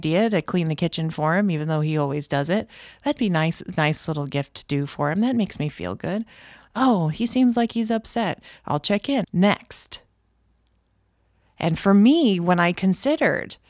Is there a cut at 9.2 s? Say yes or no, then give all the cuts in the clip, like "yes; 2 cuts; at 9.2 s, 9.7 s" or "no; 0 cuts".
yes; 1 cut; at 9.2 s